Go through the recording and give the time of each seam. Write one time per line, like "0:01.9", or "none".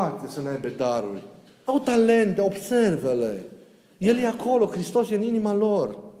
0:01.6